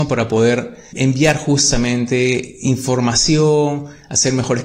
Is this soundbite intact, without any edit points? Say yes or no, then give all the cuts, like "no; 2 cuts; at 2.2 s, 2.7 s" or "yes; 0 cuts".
no; 1 cut; at 0.9 s